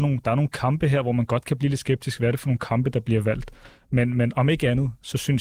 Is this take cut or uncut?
uncut